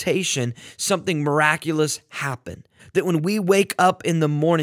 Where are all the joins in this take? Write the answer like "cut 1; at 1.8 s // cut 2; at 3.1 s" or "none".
cut 1; at 2.8 s